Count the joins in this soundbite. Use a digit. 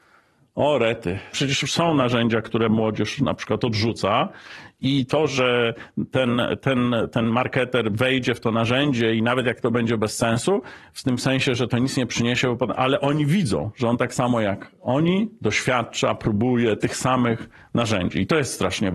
1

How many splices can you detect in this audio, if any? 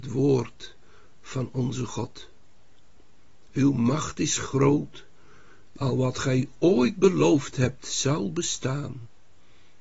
1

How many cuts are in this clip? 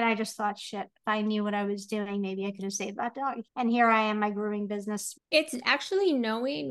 2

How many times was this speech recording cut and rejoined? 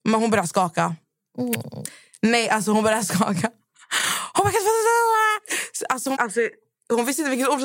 1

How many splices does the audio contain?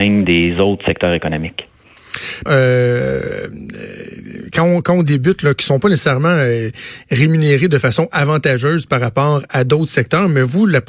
1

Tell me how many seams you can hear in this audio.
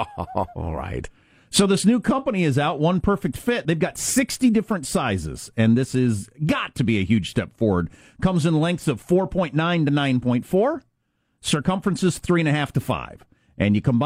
0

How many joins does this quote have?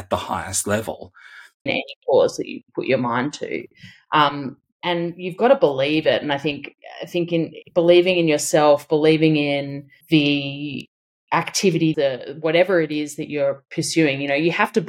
3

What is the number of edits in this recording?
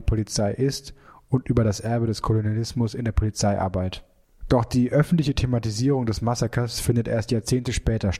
0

